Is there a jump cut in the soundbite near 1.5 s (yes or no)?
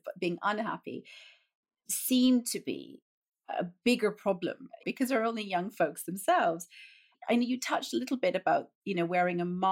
no